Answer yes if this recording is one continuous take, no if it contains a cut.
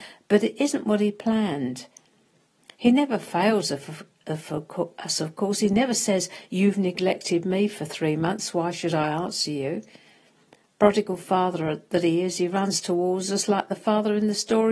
yes